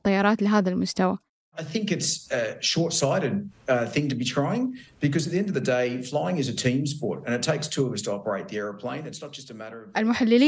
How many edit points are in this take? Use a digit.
0